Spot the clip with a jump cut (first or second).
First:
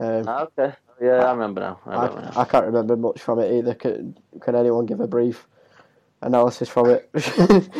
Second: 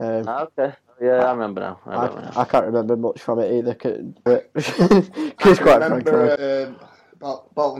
second